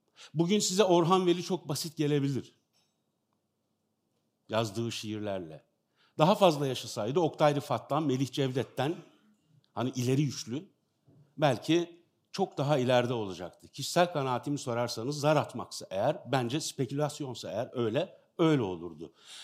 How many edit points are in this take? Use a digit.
0